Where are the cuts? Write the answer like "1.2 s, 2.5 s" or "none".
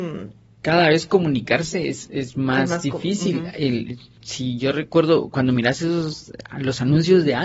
none